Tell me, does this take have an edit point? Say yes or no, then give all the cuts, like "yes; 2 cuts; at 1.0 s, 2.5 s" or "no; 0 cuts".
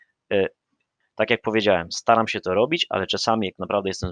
yes; 1 cut; at 1.0 s